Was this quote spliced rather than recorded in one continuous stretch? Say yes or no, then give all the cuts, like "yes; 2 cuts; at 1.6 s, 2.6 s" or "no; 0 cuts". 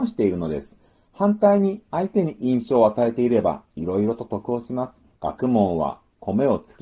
yes; 2 cuts; at 2.4 s, 5.1 s